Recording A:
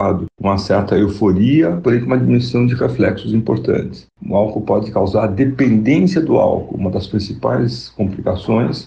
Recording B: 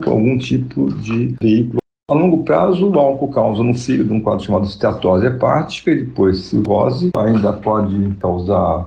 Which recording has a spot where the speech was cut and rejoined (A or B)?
A